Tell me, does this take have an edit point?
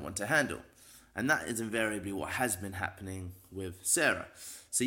no; 0 cuts

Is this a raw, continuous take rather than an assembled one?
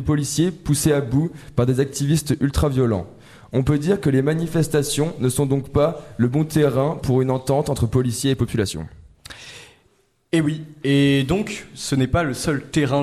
yes; 0 cuts

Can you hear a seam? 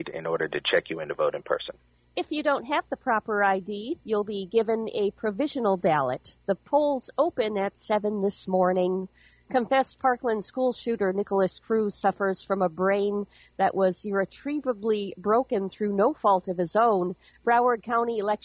yes; 1 cut; at 17.3 s

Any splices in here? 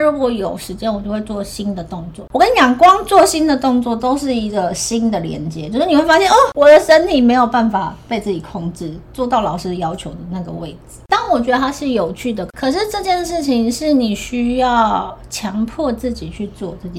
no; 0 cuts

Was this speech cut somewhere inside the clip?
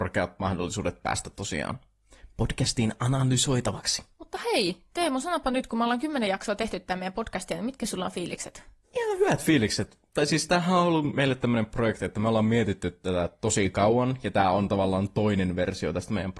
no; 0 cuts

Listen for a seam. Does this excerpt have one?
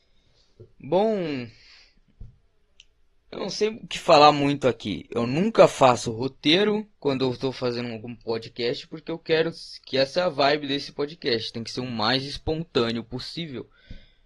no; 0 cuts

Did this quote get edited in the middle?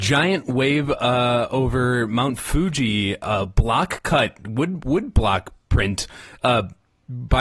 no; 0 cuts

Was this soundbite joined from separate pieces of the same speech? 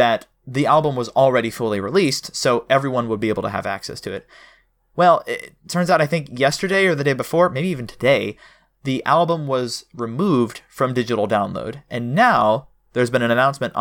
no; 0 cuts

